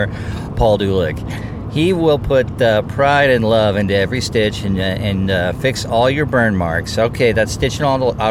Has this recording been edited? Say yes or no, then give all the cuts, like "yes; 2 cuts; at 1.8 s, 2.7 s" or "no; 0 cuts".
no; 0 cuts